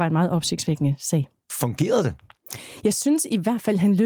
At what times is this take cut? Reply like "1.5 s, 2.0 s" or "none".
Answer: none

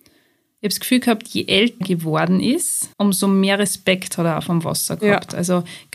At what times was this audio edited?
1.8 s, 2.9 s

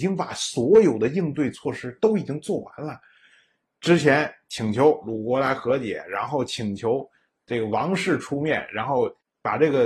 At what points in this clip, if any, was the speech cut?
none

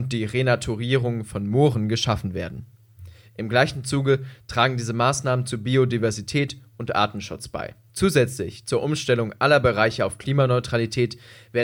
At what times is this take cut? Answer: 7.9 s

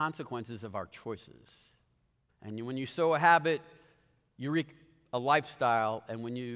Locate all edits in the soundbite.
2.3 s

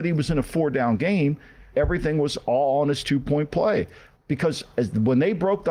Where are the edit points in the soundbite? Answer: 1.7 s, 4.1 s

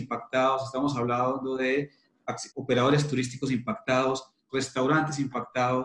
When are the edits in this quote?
2.5 s, 4.5 s

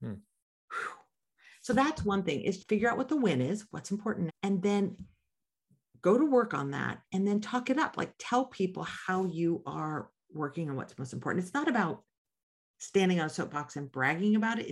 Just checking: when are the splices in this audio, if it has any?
2.6 s, 4.3 s

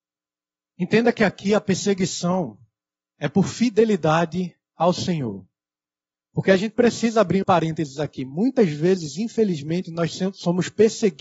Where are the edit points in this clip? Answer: 7.4 s

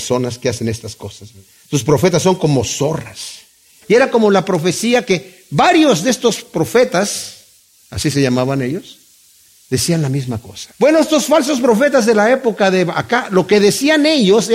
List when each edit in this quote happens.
3.8 s, 10.7 s

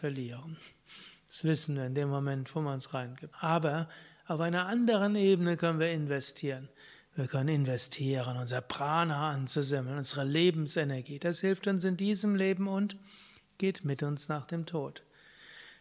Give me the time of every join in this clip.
3.3 s

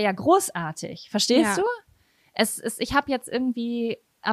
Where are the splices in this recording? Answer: none

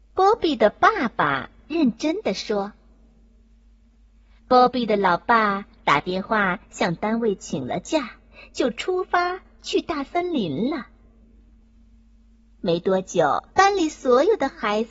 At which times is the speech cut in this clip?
11.6 s, 13.5 s

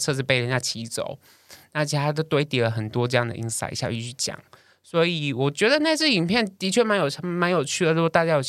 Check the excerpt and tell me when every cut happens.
none

